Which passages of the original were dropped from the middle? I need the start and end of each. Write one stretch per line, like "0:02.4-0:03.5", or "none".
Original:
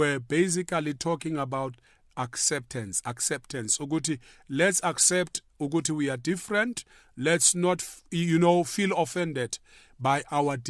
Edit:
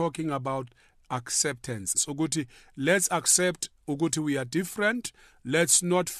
0:03.0-0:03.7